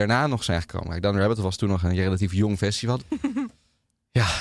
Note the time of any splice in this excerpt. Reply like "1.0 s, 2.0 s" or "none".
3.0 s